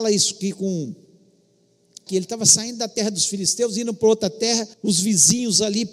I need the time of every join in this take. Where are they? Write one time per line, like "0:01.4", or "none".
0:02.1
0:04.7